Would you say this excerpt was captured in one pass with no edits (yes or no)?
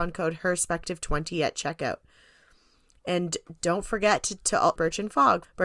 no